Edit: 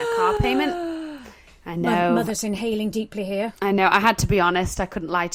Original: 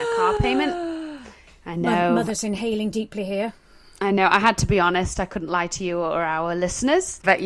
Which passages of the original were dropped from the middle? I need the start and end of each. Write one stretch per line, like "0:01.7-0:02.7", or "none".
0:03.6-0:04.0

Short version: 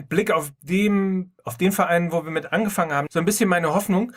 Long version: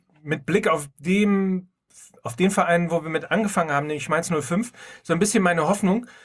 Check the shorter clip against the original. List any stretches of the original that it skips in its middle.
0:01.8-0:02.2
0:03.9-0:05.0

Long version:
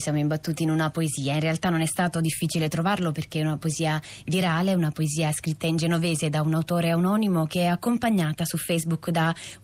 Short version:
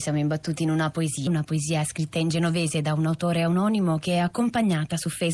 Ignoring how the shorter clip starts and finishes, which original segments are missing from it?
0:01.3-0:04.7

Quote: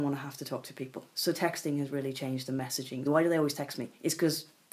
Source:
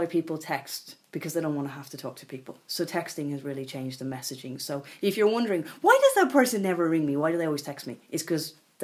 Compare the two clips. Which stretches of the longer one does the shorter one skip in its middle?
0:04.6-0:07.1

